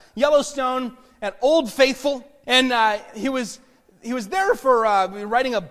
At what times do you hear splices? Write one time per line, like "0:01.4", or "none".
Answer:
0:02.4

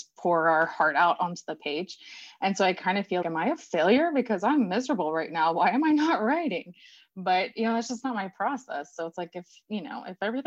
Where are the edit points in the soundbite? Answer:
0:03.2

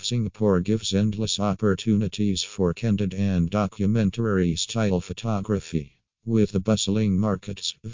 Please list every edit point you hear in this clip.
none

